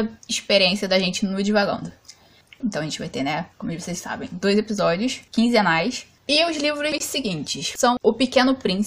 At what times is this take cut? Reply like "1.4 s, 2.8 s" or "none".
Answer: 2.6 s, 6.2 s